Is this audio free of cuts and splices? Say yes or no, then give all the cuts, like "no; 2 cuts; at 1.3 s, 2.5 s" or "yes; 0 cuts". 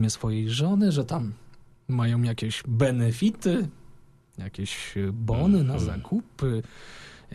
yes; 0 cuts